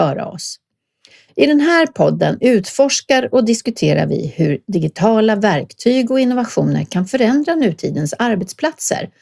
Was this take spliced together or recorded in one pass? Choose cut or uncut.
cut